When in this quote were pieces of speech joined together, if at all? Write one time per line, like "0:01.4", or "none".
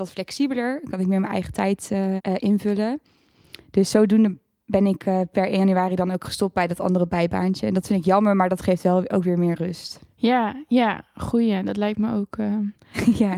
0:02.2